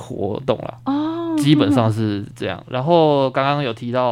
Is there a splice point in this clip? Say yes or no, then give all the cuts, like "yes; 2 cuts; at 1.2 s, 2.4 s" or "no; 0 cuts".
no; 0 cuts